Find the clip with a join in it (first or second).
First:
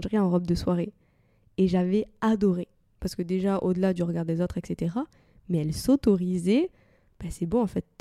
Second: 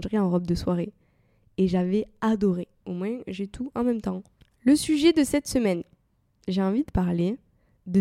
second